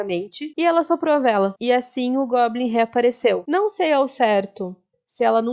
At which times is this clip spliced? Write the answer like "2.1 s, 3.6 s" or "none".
none